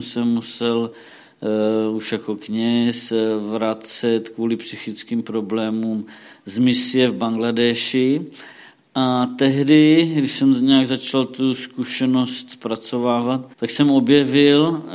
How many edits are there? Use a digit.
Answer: 1